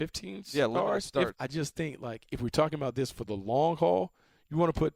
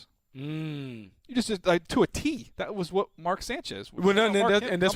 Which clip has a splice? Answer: first; 1 cut; at 1.3 s

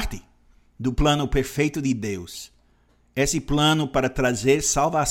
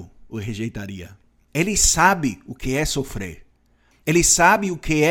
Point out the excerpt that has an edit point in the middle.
second; 1 cut; at 1.5 s

